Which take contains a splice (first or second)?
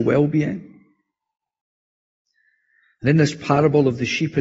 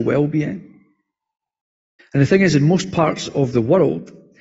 second